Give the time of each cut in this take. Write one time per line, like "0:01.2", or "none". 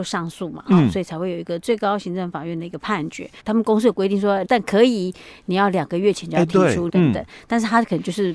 0:03.4
0:04.4
0:06.9